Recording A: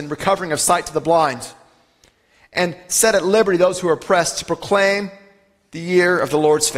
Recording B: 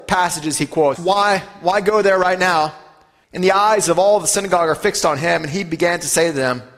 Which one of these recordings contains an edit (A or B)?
B